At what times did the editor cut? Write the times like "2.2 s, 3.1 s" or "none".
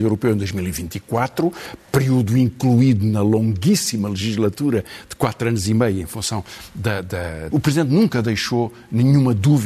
7.5 s